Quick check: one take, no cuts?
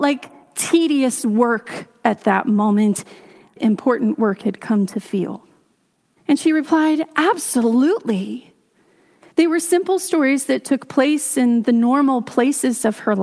no; 3 cuts; at 3.6 s, 6.2 s, 9.2 s

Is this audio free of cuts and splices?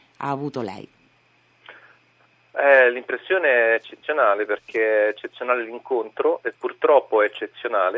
yes; 0 cuts

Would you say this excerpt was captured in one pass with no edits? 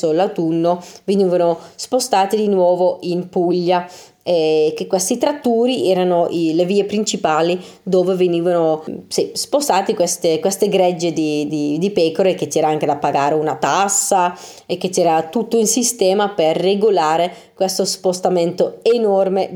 yes; 0 cuts

